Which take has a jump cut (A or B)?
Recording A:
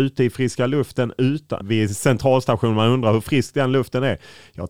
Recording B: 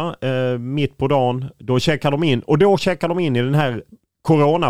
A